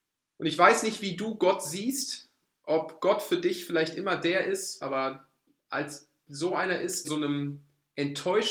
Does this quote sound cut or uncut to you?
cut